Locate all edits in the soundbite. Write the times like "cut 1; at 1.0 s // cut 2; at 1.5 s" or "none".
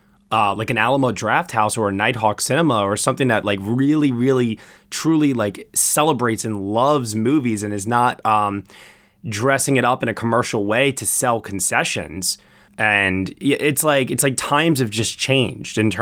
cut 1; at 12.7 s